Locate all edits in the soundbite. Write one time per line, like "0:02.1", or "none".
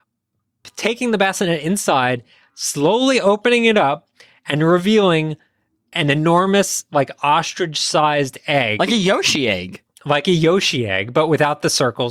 none